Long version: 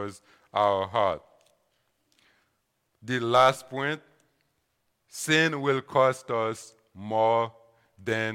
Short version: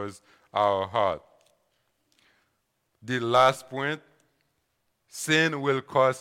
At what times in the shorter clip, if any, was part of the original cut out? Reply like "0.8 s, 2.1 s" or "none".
none